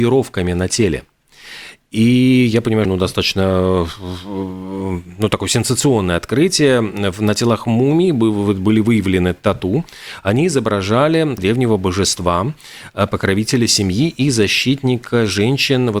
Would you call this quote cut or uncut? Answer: cut